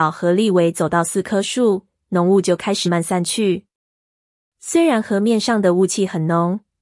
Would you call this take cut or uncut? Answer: cut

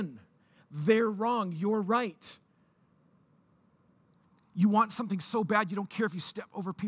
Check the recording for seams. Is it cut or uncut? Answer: uncut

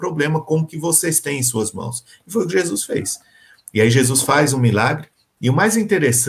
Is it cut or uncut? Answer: cut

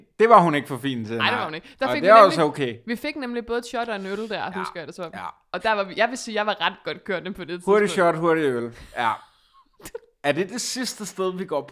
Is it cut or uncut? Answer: uncut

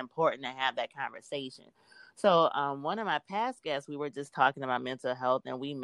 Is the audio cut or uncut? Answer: uncut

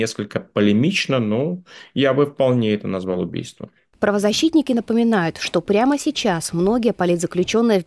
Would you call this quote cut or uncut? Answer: uncut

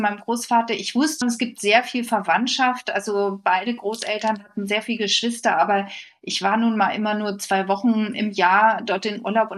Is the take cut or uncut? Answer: cut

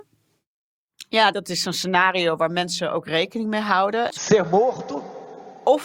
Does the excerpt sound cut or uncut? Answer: cut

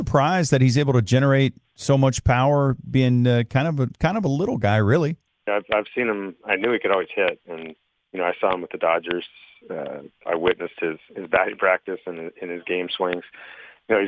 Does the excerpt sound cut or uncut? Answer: cut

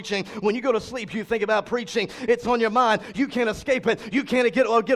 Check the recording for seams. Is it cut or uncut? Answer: cut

